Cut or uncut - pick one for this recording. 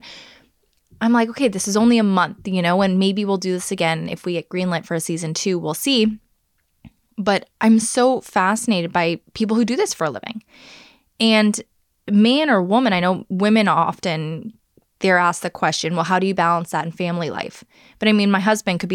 uncut